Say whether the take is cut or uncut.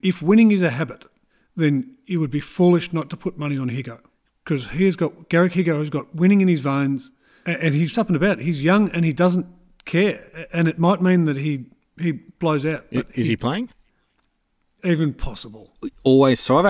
cut